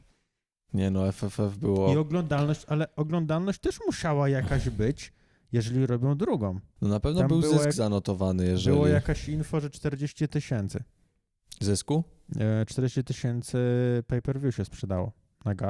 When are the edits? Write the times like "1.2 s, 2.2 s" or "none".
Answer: 6.8 s